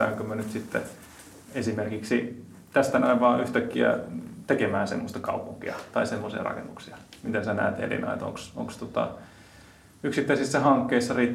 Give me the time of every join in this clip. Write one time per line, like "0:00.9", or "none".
none